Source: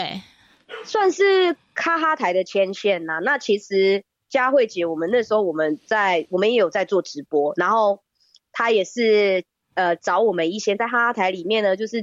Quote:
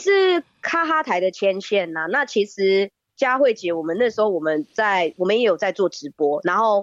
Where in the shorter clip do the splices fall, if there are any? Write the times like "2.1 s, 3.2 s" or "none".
none